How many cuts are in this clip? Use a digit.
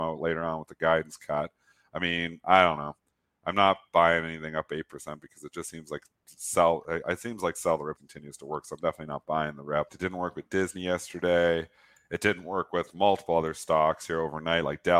2